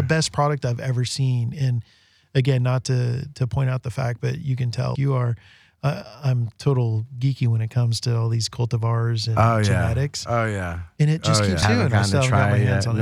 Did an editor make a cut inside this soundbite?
yes; 2 cuts; at 5.0 s, 11.6 s

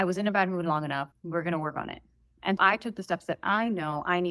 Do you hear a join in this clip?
yes; 2 cuts; at 1.1 s, 2.6 s

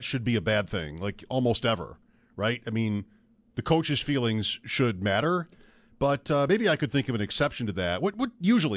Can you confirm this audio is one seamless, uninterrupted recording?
yes; 0 cuts

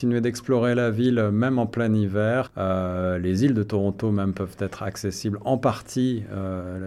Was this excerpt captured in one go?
yes; 0 cuts

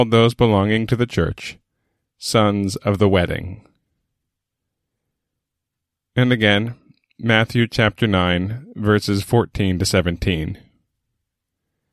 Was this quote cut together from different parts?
no; 0 cuts

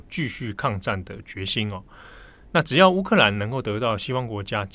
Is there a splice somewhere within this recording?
no; 0 cuts

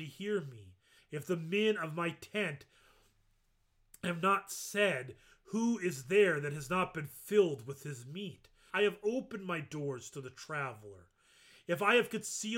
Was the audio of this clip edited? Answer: yes; 2 cuts; at 1.0 s, 8.7 s

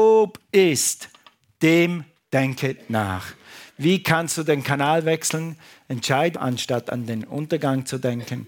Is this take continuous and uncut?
no; 1 cut; at 6.3 s

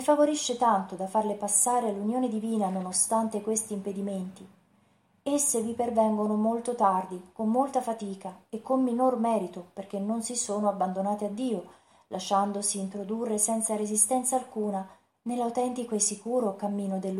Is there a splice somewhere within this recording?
no; 0 cuts

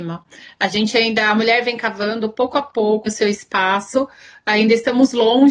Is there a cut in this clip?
yes; 1 cut; at 3.1 s

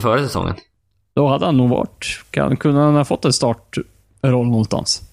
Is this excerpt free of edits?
yes; 0 cuts

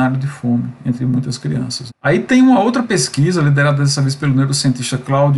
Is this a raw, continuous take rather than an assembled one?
no; 1 cut; at 1.9 s

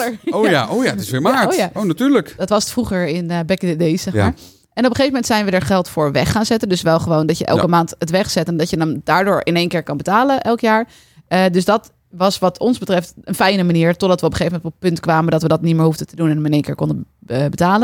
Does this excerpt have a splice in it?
no; 0 cuts

